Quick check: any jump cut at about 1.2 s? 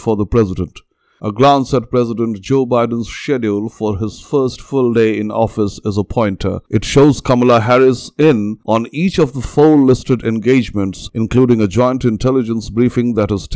yes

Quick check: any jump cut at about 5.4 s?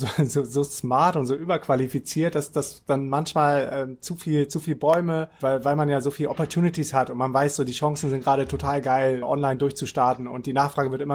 yes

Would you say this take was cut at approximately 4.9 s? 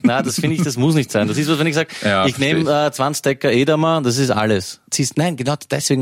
yes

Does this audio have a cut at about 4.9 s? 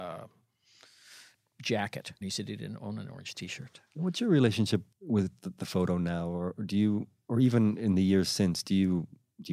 yes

